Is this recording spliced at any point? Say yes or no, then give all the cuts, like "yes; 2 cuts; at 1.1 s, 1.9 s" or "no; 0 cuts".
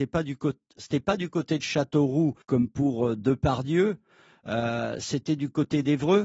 yes; 1 cut; at 2.4 s